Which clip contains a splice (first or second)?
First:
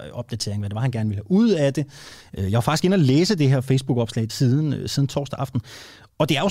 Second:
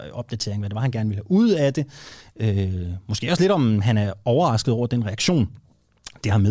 first